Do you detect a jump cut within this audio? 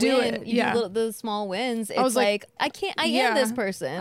yes; 1 cut; at 2.6 s

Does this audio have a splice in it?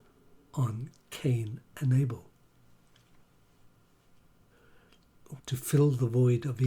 yes; 1 cut; at 5.4 s

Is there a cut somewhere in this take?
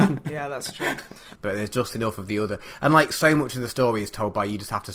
yes; 1 cut; at 1.4 s

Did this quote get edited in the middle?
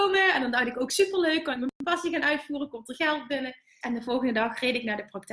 yes; 1 cut; at 3.8 s

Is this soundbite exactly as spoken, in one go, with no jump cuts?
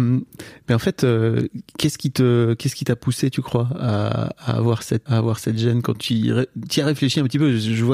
no; 1 cut; at 5.1 s

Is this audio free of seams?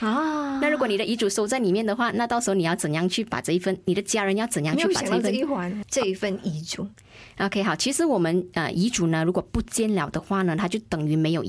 no; 1 cut; at 5.8 s

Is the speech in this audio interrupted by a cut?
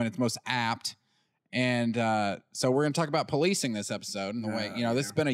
no; 0 cuts

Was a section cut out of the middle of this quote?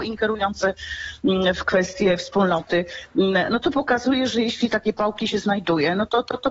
no; 0 cuts

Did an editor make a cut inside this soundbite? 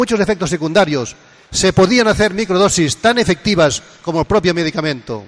no; 0 cuts

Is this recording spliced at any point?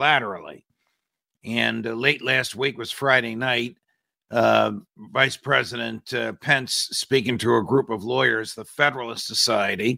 no; 0 cuts

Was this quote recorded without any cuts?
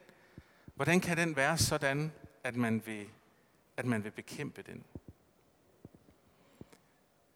yes; 0 cuts

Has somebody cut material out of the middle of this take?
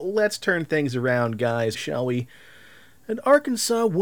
yes; 1 cut; at 1.7 s

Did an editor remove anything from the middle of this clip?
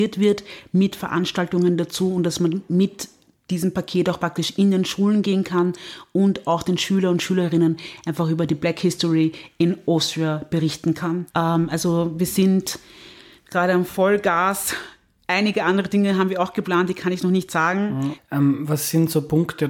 yes; 2 cuts; at 11.3 s, 18.1 s

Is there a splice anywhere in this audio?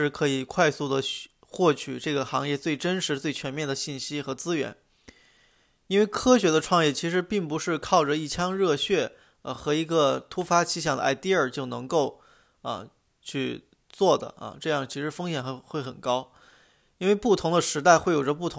no; 0 cuts

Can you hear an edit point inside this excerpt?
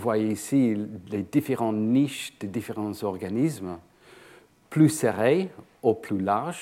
no; 0 cuts

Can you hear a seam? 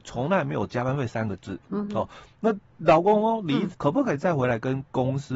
yes; 2 cuts; at 2.7 s, 3.7 s

